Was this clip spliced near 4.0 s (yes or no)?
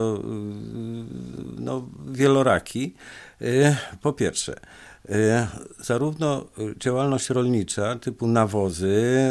no